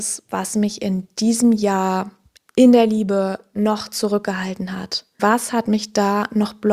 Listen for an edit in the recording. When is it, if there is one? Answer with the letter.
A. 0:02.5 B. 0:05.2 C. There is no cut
B